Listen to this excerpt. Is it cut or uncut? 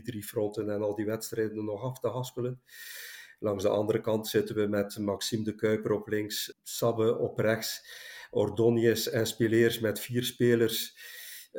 cut